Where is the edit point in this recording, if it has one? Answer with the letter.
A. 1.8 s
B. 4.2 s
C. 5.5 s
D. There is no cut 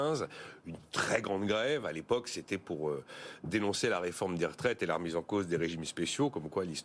D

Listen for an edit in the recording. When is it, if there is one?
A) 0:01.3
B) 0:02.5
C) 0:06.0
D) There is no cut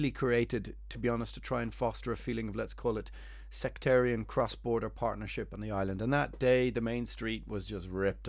D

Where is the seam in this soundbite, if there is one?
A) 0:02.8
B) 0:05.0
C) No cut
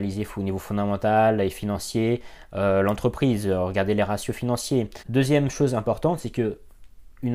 B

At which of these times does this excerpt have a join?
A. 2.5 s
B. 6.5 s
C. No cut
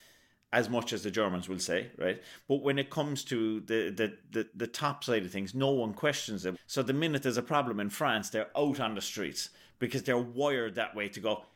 B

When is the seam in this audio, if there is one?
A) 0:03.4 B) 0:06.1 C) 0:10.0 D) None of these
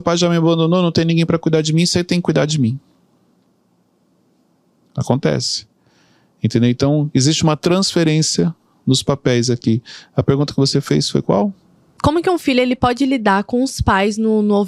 D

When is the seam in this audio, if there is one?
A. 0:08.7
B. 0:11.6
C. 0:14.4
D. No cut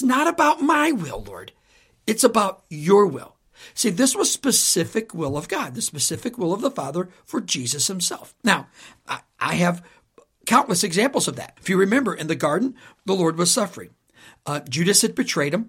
B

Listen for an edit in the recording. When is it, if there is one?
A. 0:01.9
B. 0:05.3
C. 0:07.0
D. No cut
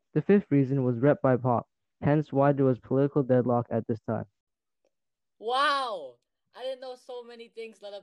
A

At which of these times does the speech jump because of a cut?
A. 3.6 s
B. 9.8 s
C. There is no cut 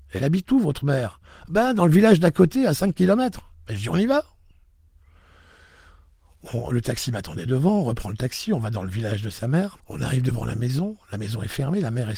B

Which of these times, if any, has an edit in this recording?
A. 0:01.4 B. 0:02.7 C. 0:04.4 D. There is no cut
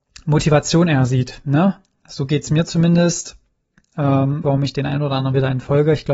C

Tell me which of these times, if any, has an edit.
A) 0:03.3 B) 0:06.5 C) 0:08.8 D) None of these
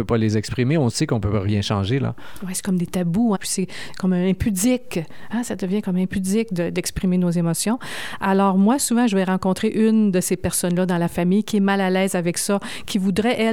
A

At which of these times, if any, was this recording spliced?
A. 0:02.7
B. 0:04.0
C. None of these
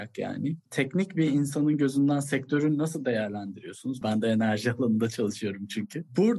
B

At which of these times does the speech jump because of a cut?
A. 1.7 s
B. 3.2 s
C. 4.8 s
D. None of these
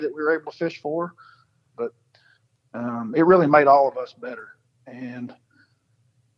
A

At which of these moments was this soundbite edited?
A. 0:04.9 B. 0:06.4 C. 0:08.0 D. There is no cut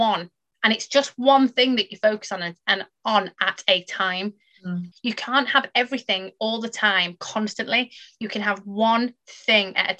A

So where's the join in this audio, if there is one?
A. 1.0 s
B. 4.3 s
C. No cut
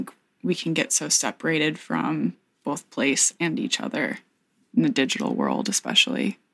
C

